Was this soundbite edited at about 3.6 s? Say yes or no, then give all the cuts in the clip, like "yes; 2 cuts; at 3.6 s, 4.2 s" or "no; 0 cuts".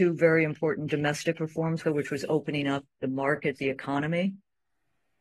yes; 2 cuts; at 1.8 s, 3.6 s